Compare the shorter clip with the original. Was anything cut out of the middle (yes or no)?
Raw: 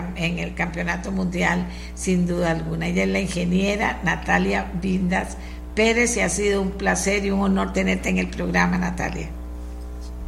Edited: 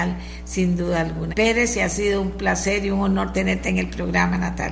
yes